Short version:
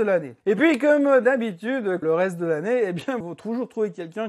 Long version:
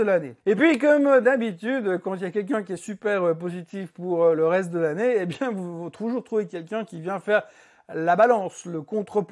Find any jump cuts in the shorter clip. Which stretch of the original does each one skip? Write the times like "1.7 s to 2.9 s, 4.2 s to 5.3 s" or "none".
2.0 s to 4.4 s, 5.5 s to 5.8 s